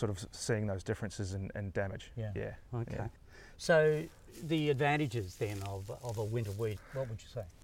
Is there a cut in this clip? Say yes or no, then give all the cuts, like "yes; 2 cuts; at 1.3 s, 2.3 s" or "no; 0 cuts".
no; 0 cuts